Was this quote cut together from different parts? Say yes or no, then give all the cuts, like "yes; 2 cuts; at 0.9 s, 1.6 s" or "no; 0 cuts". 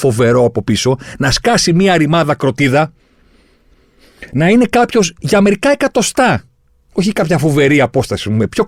no; 0 cuts